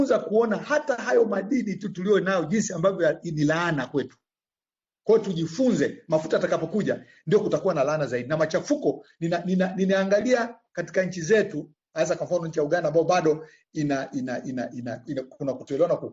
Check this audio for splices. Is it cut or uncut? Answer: uncut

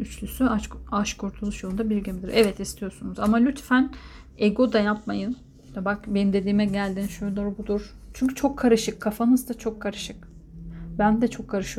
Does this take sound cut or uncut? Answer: uncut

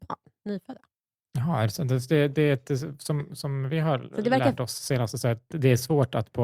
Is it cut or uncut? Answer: uncut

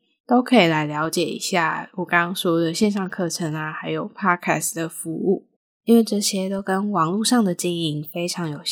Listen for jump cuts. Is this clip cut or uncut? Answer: uncut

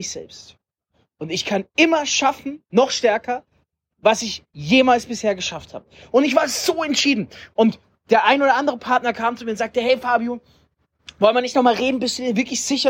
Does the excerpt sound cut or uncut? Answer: uncut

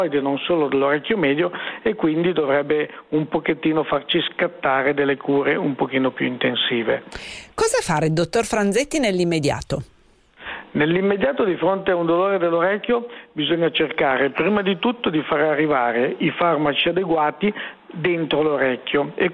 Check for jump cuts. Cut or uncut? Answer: uncut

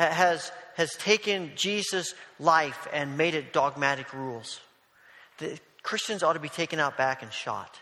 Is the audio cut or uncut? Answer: uncut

